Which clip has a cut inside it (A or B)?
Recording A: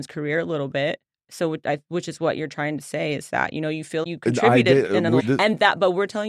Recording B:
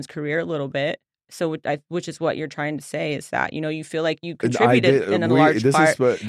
A